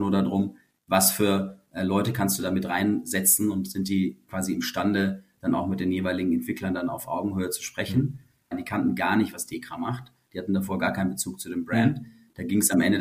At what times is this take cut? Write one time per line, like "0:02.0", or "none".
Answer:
0:08.5